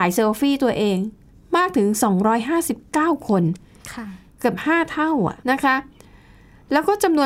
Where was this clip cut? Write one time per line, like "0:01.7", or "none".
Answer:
0:05.4